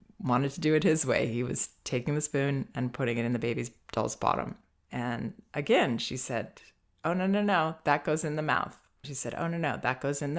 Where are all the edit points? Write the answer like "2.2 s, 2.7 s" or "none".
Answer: 9.0 s